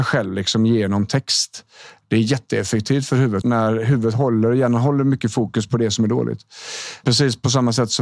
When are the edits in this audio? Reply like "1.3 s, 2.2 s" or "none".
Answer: 3.4 s, 7.0 s

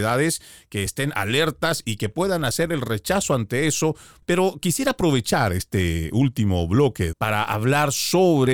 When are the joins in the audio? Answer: 7.1 s

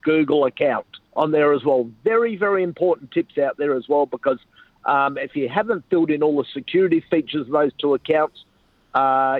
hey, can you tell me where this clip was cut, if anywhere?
1.1 s

